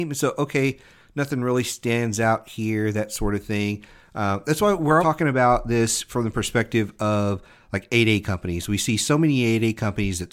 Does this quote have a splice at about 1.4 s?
no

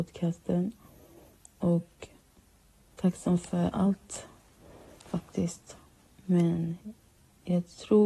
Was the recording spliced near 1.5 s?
no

